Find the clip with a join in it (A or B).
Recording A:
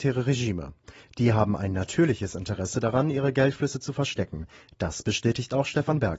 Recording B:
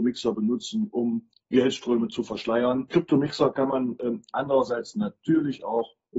B